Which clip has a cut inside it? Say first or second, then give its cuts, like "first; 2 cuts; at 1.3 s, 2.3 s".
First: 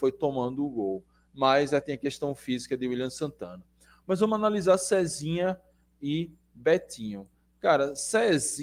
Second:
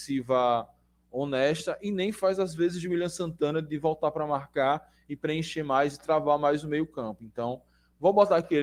first; 1 cut; at 1.8 s